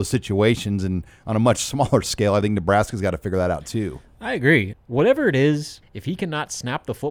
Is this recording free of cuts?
no; 2 cuts; at 4.7 s, 5.8 s

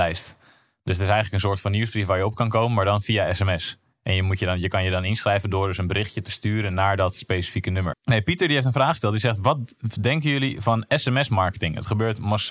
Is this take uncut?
no; 1 cut; at 7.9 s

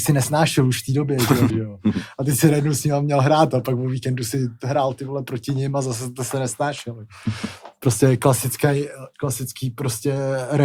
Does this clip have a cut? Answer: yes; 1 cut; at 1.5 s

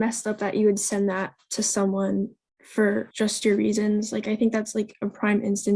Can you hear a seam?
yes; 1 cut; at 3.1 s

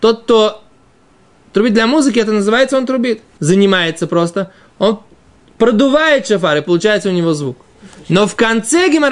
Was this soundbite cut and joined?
yes; 1 cut; at 3.4 s

